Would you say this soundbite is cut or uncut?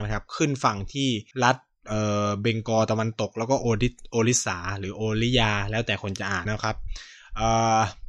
cut